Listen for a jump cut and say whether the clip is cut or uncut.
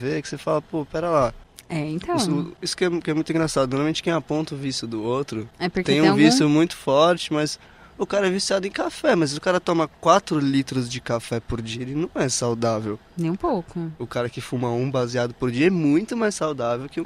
uncut